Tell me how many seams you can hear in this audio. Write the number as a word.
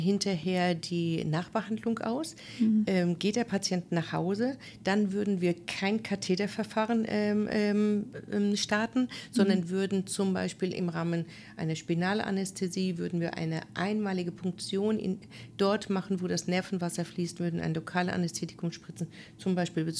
zero